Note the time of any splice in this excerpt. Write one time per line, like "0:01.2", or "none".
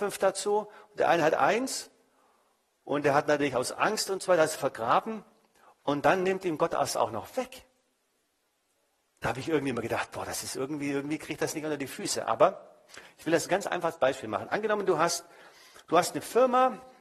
0:04.6